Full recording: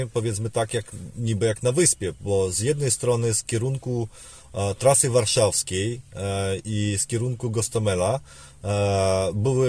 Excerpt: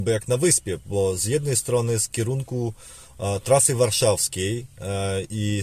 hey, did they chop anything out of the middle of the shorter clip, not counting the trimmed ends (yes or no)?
no